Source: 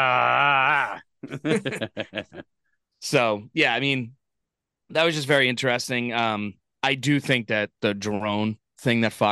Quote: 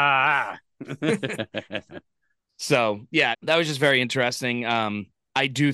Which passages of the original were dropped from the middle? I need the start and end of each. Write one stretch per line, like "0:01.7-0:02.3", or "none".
0:03.7-0:04.8